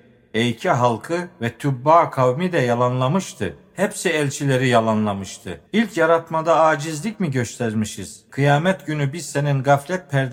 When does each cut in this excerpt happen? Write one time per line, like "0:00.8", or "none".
0:05.7
0:08.3